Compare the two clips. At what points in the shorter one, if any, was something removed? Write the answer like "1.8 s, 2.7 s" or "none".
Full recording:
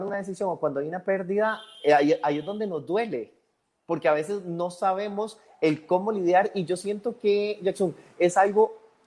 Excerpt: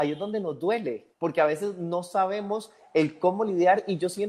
1.1 s